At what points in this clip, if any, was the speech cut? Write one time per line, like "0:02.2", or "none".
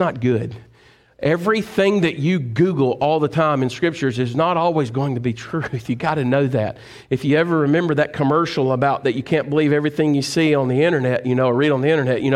none